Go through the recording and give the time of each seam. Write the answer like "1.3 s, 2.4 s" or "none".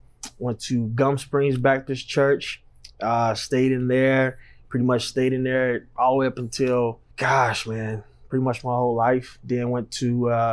7.1 s